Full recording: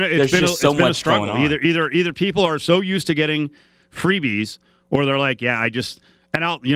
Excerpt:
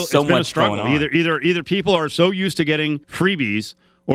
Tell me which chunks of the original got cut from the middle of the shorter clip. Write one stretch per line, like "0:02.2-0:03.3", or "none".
0:03.5-0:03.9